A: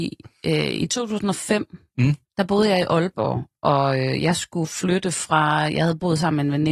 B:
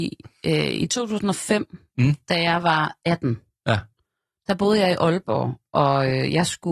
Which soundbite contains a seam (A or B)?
A